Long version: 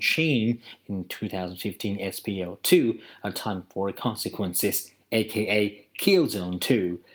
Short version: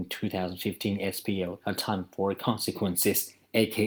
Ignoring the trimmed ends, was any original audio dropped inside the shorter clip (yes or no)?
yes